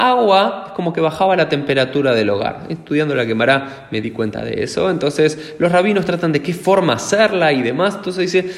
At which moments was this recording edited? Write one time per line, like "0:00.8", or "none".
none

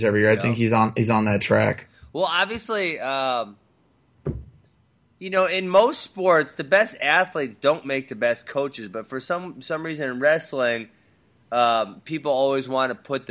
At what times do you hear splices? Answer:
none

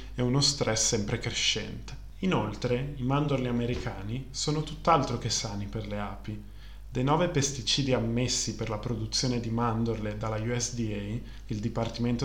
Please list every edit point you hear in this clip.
none

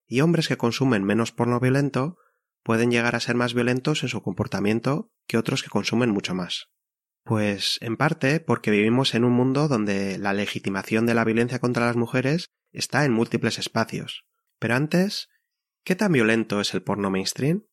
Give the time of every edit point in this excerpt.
0:07.1
0:14.5

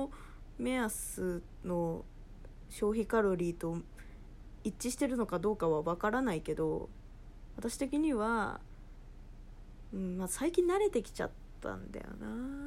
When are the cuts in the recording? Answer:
none

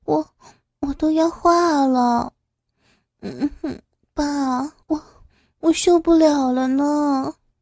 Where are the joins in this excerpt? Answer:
0:04.8

